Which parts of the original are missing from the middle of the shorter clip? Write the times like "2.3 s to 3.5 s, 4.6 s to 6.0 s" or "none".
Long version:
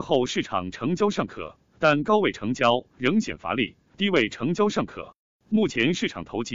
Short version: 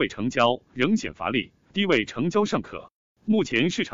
none